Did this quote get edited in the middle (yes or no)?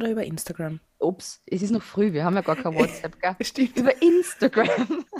no